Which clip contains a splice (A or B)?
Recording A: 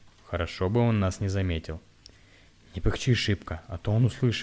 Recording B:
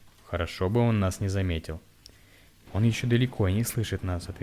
B